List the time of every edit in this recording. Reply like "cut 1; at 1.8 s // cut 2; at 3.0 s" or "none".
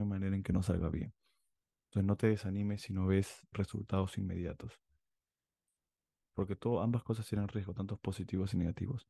cut 1; at 3.5 s // cut 2; at 6.2 s